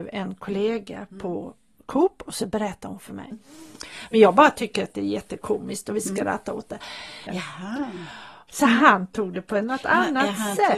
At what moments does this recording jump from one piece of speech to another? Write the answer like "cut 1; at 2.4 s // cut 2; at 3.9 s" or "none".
cut 1; at 3.3 s // cut 2; at 7.3 s // cut 3; at 8.5 s